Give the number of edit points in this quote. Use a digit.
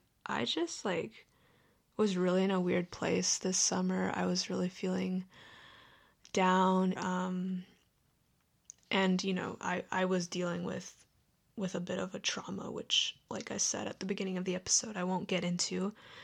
1